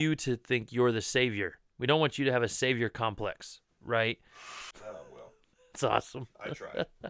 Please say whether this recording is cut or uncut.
cut